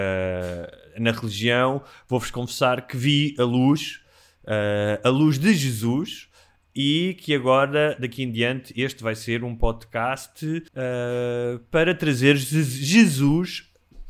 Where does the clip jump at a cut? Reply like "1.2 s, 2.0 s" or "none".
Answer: 10.7 s